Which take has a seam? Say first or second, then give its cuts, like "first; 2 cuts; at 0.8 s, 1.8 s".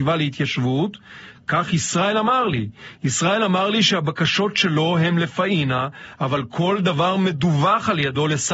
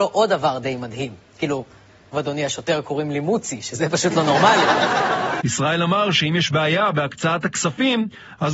second; 2 cuts; at 2.1 s, 5.4 s